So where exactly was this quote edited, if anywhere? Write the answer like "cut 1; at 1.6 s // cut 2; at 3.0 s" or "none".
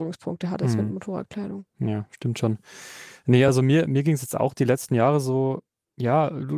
none